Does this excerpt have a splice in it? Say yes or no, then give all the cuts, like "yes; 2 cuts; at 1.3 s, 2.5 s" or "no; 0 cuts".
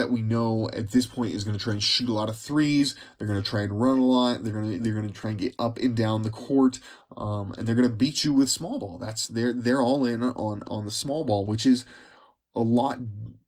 no; 0 cuts